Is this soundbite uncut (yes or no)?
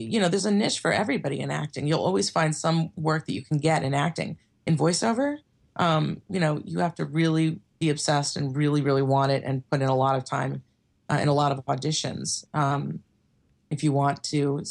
yes